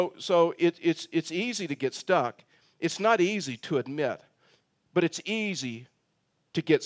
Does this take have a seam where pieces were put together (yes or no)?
no